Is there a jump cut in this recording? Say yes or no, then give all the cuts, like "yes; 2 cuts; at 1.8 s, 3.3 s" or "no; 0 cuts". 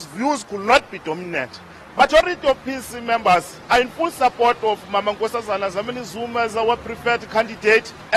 yes; 1 cut; at 1.9 s